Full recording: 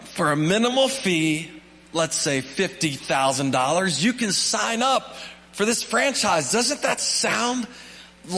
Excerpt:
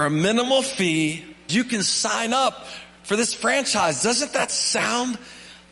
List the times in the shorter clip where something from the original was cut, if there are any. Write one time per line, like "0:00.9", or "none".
0:01.5